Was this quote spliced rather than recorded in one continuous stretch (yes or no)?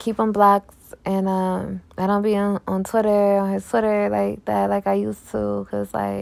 yes